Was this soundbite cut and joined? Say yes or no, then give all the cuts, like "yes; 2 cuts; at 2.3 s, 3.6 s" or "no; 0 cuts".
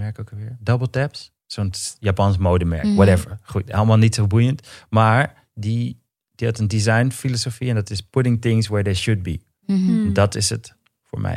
no; 0 cuts